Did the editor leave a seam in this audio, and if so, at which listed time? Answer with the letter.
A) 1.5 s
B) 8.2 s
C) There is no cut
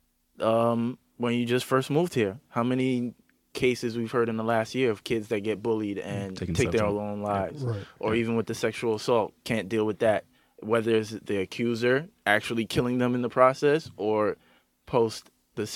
C